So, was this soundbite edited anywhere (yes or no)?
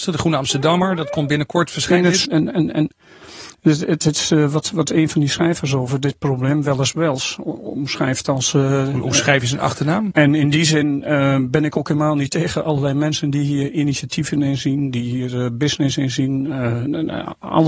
yes